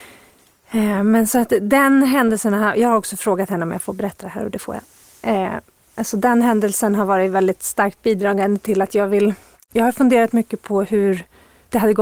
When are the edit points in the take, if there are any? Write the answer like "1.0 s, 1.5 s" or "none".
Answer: none

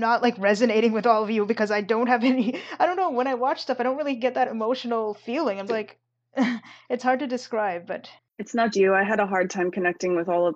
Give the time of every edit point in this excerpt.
5.7 s, 8.7 s

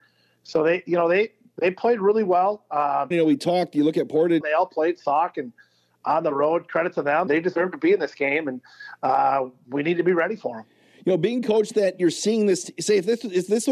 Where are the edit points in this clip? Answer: 3.1 s, 4.4 s, 7.3 s

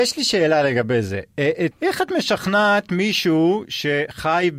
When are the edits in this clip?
1.7 s

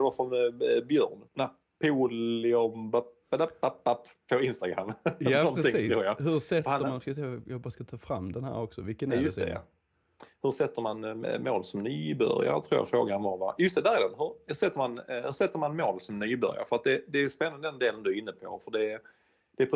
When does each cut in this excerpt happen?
1.3 s

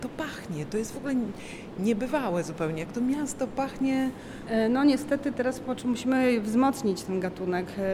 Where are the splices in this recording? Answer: none

